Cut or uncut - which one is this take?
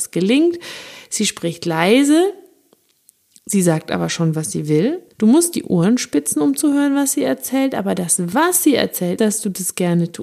cut